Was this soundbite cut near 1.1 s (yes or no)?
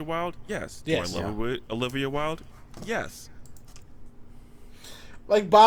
no